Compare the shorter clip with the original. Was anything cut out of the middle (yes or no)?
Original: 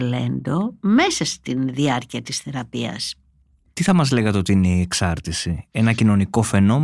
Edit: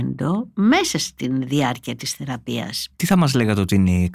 yes